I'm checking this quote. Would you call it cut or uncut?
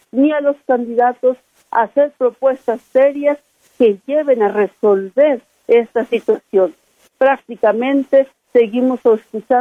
uncut